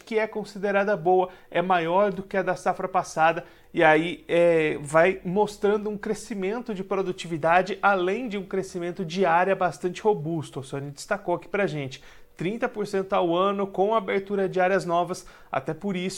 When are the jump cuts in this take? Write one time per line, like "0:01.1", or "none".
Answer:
none

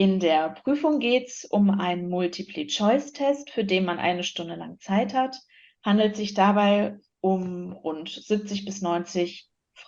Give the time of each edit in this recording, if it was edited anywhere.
none

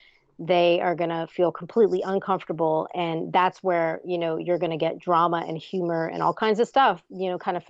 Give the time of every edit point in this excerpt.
none

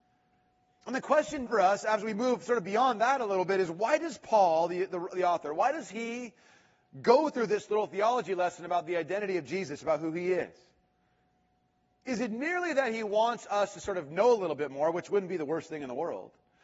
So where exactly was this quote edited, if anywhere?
0:01.5

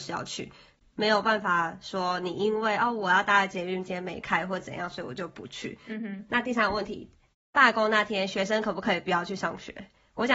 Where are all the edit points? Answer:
none

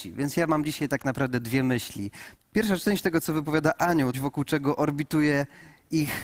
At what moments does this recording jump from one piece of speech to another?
0:02.4
0:04.1

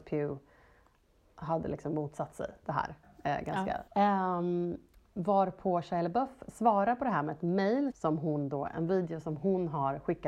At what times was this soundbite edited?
0:03.9
0:07.9

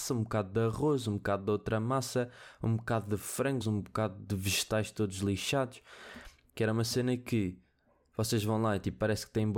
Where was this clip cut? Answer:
0:03.6
0:06.5

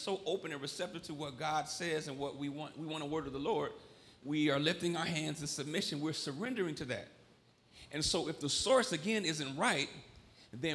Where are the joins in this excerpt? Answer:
none

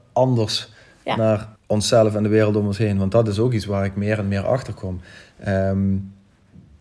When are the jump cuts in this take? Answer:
0:01.6

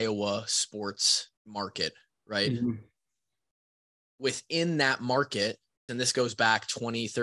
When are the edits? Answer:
0:01.4
0:05.9

